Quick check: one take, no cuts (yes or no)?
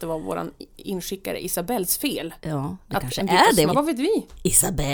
no